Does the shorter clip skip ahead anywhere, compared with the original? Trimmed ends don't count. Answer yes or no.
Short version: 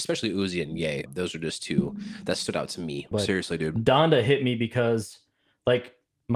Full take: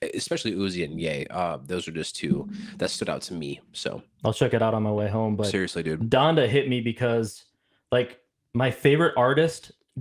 yes